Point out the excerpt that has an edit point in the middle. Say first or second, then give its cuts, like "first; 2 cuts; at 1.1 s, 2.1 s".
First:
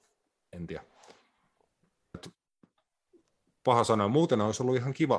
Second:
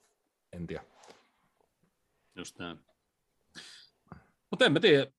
first; 1 cut; at 2.1 s